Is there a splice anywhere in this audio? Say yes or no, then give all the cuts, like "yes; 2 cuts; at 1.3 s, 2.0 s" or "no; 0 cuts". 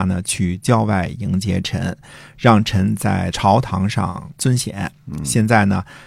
no; 0 cuts